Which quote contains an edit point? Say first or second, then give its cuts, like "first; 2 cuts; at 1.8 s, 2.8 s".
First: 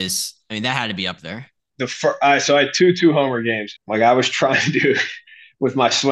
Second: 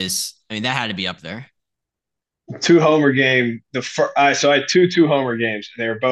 first; 2 cuts; at 1.7 s, 3.8 s